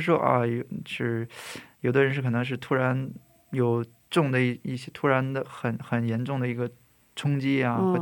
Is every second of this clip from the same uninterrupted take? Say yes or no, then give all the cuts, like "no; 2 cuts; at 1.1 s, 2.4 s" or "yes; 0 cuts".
yes; 0 cuts